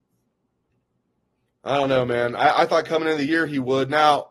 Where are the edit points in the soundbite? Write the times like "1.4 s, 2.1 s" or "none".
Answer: 1.5 s